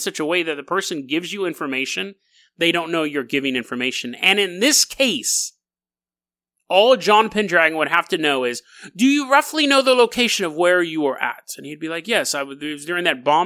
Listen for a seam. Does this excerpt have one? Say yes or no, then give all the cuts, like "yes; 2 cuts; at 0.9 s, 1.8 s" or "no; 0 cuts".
no; 0 cuts